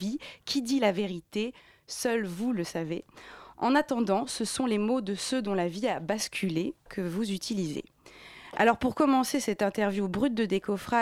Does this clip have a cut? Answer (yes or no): no